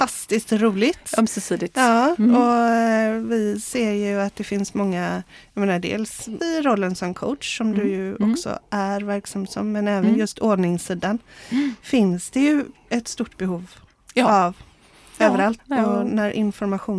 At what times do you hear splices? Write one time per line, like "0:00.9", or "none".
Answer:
0:06.4
0:15.6